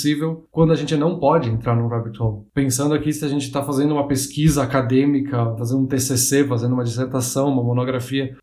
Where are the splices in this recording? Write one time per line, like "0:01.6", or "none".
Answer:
0:05.6